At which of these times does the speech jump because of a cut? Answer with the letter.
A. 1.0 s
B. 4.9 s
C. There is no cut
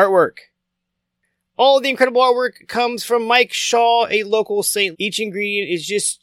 B